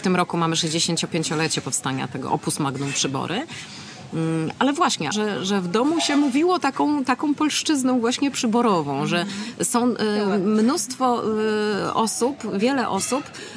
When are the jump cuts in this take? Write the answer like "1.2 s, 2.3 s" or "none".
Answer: 5.1 s